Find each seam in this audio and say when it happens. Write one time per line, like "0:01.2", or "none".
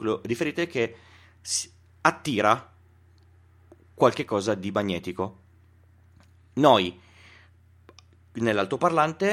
none